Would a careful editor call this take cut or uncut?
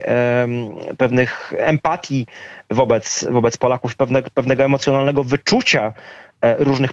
uncut